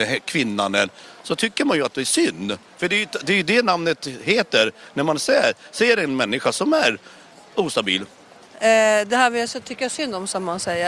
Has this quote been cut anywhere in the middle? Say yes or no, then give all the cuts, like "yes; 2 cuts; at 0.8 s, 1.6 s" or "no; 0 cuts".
no; 0 cuts